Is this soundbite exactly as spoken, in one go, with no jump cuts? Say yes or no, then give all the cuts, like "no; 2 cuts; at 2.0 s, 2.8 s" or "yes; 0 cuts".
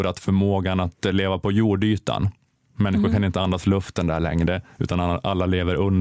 yes; 0 cuts